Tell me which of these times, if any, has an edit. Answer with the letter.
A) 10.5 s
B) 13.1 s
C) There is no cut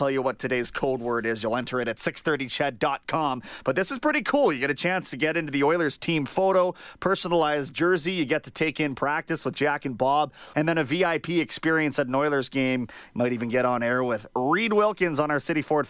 A